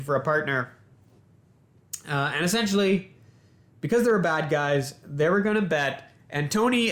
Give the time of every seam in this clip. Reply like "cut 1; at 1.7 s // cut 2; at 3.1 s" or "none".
none